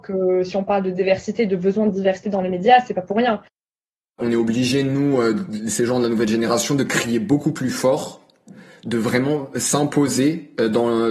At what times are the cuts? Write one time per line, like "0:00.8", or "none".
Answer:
none

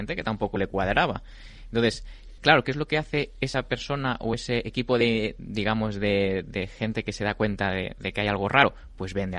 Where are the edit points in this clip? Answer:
0:02.4

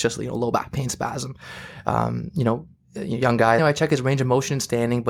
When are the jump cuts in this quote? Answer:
0:03.6

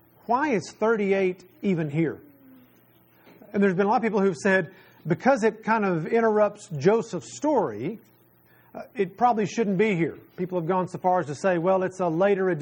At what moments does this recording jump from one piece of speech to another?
none

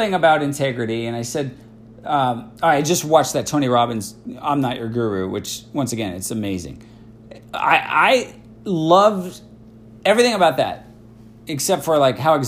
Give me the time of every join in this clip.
none

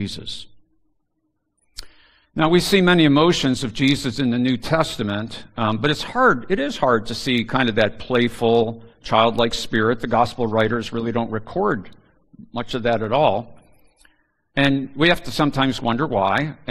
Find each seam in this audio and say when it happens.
none

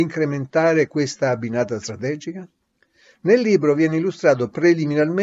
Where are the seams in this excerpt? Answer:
none

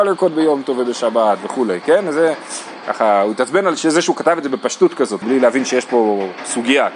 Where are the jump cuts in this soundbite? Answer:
0:05.2

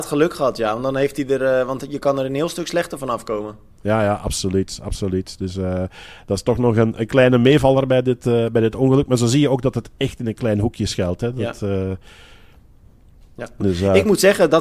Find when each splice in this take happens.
none

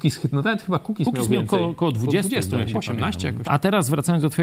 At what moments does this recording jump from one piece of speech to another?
0:03.4

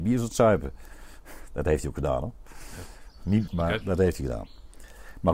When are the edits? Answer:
0:03.5

